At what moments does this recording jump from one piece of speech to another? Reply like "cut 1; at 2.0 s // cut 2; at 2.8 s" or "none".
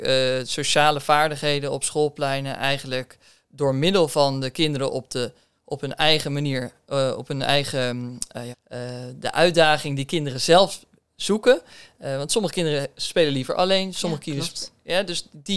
cut 1; at 8.5 s